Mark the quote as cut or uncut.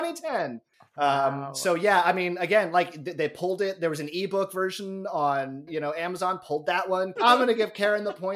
cut